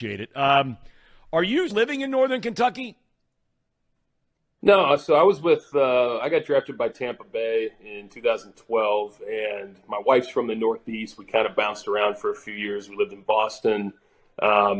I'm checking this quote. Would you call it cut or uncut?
cut